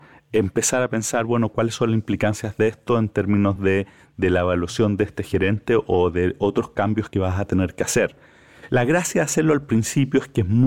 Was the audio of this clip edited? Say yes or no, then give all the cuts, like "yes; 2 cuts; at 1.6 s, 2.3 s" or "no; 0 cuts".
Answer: no; 0 cuts